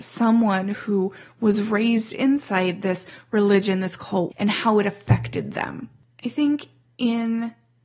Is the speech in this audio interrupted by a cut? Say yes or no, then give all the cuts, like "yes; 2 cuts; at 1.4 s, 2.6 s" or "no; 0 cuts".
yes; 1 cut; at 4.3 s